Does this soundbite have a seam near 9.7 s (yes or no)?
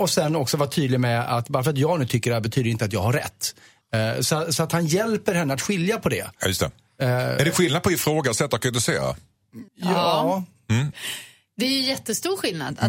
yes